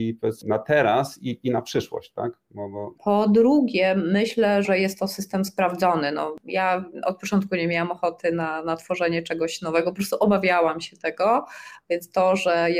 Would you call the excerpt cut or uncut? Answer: cut